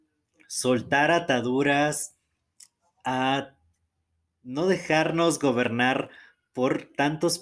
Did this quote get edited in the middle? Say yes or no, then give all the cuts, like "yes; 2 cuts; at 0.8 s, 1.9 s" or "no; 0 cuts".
no; 0 cuts